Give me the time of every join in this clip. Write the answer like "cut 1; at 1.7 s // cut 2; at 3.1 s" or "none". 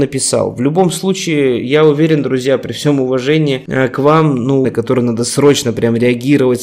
cut 1; at 4.6 s